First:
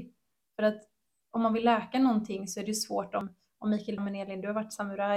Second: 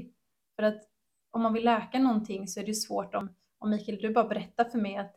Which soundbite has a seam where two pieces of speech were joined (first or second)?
first